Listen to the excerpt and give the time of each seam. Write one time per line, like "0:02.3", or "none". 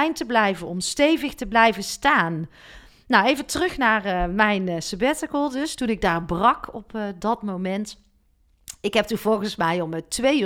none